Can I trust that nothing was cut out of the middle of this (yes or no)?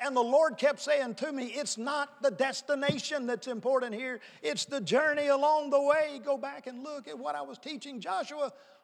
yes